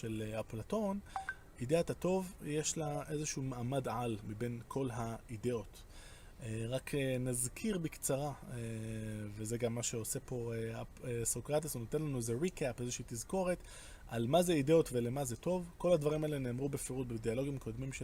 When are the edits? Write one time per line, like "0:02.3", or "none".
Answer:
none